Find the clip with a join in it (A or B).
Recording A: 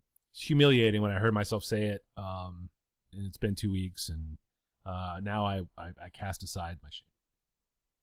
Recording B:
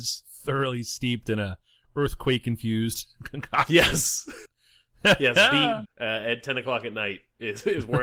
B